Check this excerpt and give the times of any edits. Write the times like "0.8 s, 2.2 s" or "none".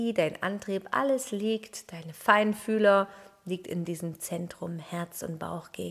none